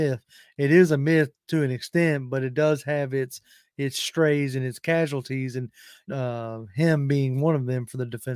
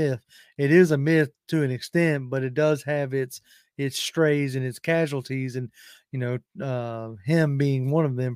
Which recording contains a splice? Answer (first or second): first